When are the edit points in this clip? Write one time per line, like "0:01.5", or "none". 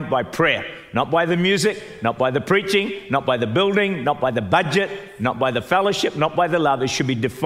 none